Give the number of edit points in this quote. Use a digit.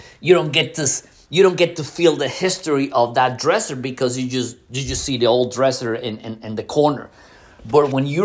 0